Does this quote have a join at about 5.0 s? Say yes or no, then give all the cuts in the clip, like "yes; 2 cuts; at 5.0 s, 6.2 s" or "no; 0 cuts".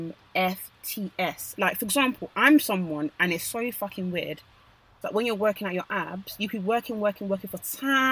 yes; 2 cuts; at 1.6 s, 5.0 s